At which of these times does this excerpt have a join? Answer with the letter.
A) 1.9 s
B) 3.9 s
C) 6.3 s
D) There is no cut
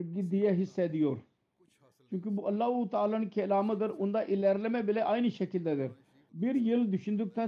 C